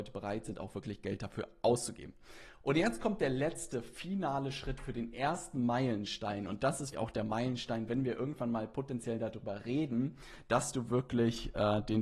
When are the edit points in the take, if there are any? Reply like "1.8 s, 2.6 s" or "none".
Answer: 6.9 s